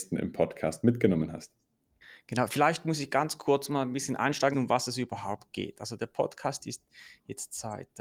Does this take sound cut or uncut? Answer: cut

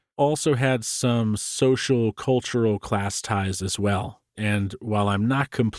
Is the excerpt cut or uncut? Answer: cut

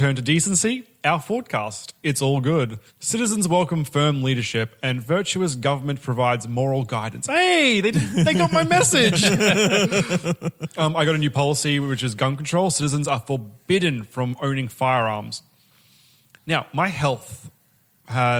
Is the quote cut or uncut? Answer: cut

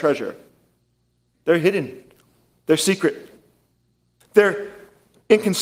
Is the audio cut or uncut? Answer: cut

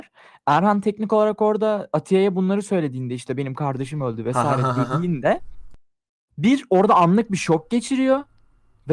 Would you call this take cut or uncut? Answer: uncut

